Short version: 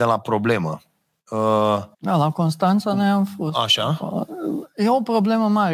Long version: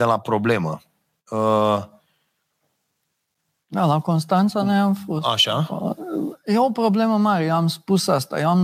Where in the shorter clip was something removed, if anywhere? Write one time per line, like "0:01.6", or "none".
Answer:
0:01.9